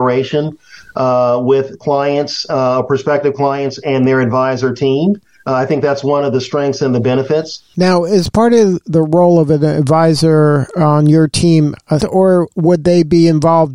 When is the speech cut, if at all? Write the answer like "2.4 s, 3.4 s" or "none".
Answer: 7.7 s, 12.0 s